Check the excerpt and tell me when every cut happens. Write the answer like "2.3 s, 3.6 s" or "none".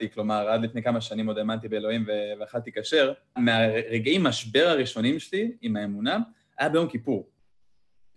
3.4 s

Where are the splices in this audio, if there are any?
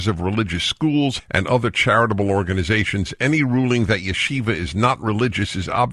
1.2 s

